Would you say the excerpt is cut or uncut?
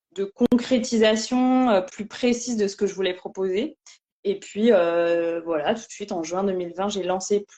cut